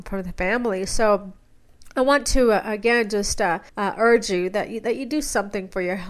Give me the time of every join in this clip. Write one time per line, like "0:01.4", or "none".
0:03.7